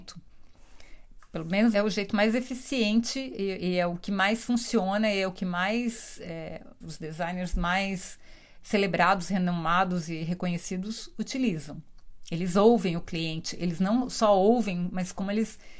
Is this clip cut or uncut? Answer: cut